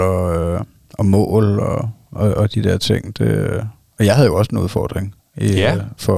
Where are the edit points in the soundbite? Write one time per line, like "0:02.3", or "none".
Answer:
none